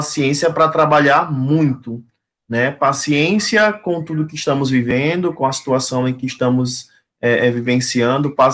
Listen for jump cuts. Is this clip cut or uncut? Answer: uncut